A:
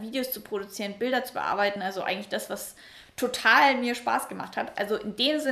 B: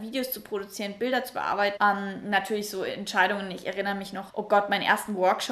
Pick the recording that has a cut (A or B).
B